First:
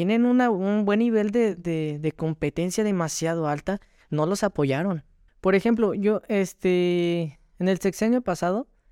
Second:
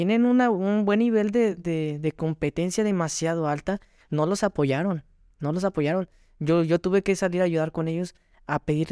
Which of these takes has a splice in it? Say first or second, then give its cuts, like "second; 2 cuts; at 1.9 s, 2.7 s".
first; 1 cut; at 5.3 s